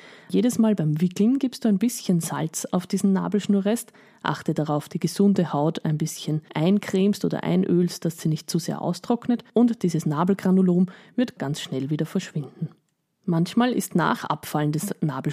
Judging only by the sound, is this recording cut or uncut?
cut